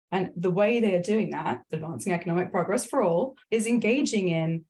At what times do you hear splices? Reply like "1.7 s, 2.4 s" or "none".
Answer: 1.7 s, 3.4 s